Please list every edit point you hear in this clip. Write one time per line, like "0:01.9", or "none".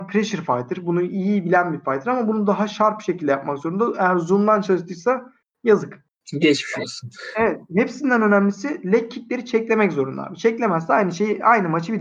none